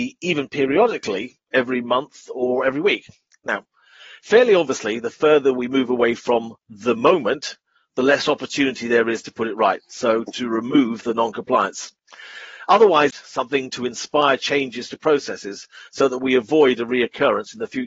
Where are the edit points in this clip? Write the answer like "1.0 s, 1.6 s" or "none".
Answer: 13.1 s

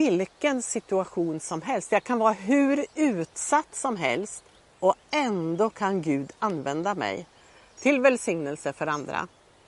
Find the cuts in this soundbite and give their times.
none

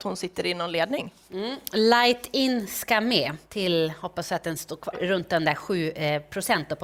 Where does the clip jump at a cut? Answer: 3.4 s, 4.9 s

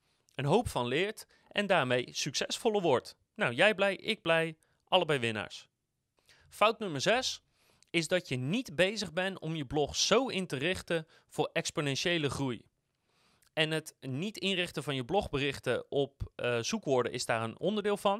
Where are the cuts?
none

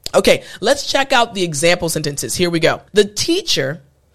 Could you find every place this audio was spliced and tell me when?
2.9 s

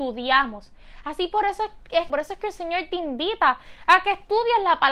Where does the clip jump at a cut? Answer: 2.1 s

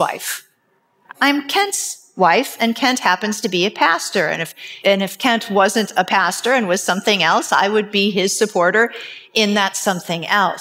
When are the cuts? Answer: 1.1 s, 4.8 s

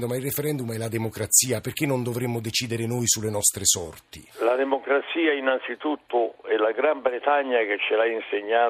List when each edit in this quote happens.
4.3 s

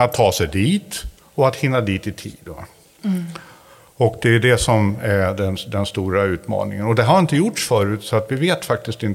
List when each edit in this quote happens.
none

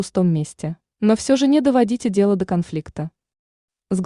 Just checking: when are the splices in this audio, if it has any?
0.9 s

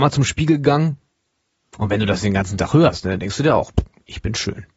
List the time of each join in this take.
none

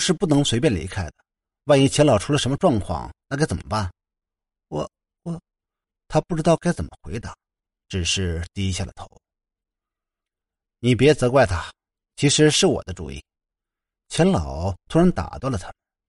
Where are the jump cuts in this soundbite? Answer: none

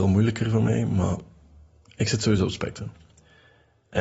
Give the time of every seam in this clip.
none

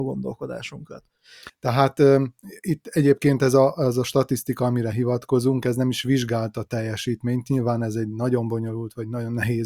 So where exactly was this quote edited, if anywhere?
1.5 s

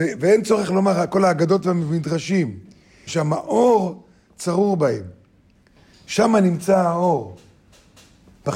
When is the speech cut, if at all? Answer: 3.1 s

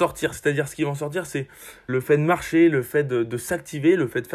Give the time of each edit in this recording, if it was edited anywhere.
1.9 s

